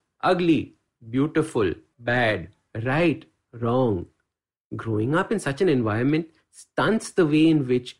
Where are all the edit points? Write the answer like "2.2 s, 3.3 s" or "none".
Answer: 1.9 s